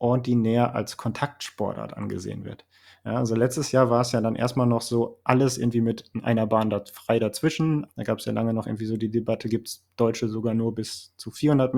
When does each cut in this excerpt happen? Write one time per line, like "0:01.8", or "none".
0:07.9